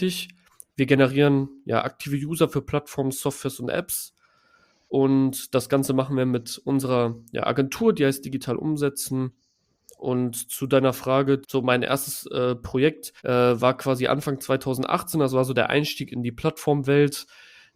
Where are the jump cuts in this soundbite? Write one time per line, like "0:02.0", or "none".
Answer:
0:11.4
0:13.2